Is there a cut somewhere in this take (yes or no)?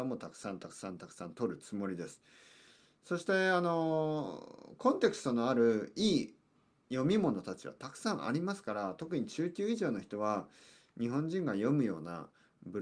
no